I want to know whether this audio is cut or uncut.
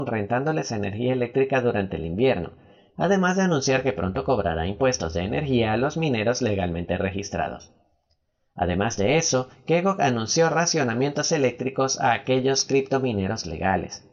uncut